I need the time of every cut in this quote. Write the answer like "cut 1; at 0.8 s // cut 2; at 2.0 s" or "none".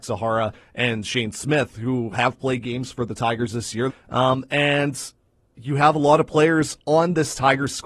cut 1; at 3.9 s